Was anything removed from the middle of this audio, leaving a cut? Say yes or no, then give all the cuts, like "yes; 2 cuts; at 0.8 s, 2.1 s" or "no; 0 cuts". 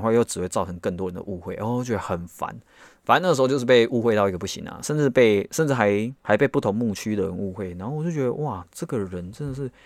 yes; 1 cut; at 6.2 s